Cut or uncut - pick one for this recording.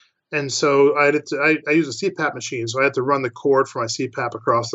uncut